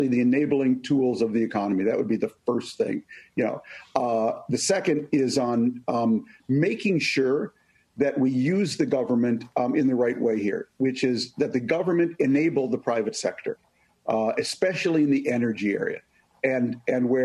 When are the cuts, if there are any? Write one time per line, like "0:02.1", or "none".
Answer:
none

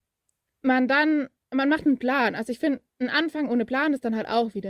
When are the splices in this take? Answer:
none

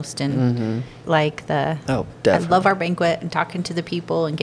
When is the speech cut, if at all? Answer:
0:01.0

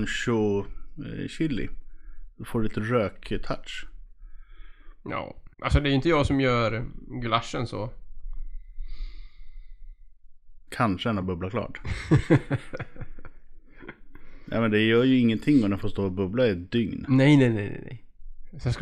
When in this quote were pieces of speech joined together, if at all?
0:05.5
0:10.7

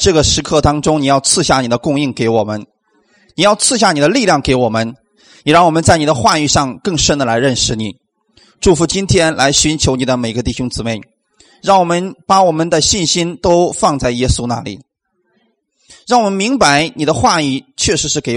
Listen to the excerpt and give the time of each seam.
none

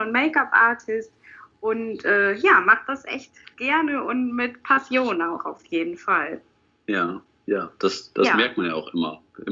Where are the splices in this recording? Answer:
none

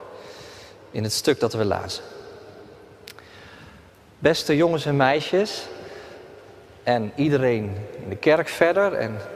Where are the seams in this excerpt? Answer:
none

